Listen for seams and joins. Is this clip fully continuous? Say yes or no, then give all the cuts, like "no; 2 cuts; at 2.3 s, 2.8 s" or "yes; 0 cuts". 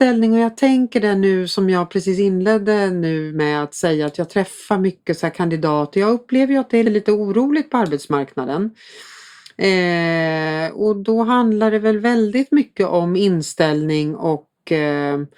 no; 1 cut; at 6.8 s